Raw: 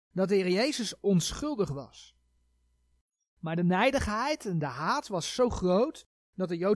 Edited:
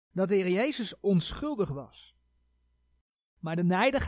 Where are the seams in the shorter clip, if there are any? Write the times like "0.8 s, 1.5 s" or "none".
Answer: none